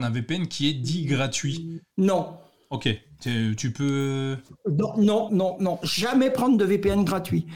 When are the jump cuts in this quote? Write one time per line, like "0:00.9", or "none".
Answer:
0:01.9
0:05.3